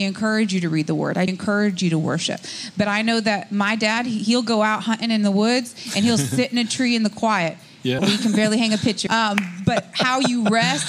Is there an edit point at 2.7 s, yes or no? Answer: no